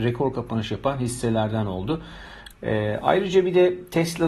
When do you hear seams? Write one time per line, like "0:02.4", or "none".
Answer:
0:02.5